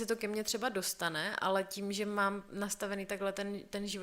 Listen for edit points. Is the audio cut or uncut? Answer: uncut